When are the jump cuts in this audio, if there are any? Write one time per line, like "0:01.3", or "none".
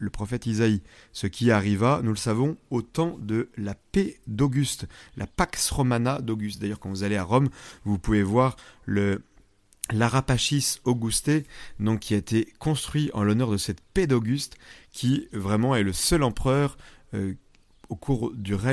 none